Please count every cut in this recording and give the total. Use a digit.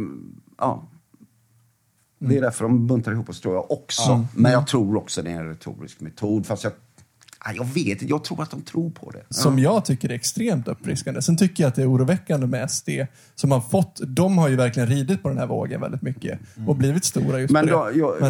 1